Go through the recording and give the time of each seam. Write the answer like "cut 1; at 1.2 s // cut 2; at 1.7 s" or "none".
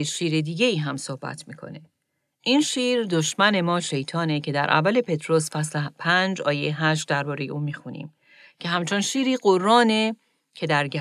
none